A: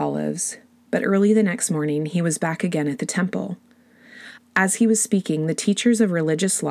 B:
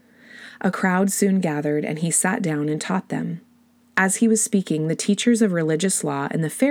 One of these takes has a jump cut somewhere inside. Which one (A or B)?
A